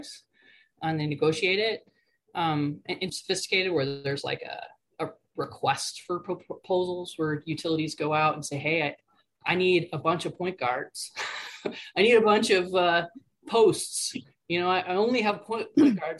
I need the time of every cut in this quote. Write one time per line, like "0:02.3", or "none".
0:03.1